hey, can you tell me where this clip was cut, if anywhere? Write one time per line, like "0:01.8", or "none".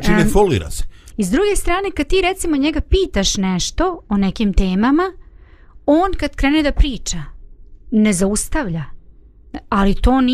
0:01.1

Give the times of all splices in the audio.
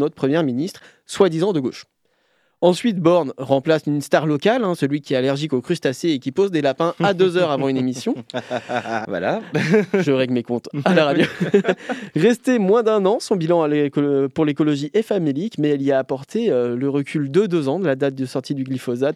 0:09.0

